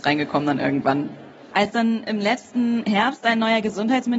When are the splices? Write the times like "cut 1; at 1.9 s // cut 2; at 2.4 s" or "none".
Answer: cut 1; at 1.5 s